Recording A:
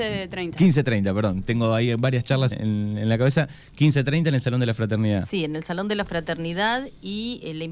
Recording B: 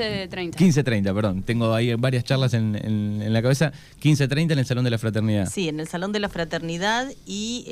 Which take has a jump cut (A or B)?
A